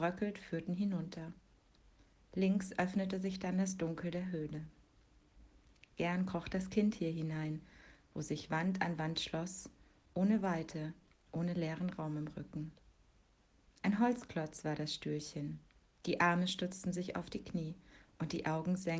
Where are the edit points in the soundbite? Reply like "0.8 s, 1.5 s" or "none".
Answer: none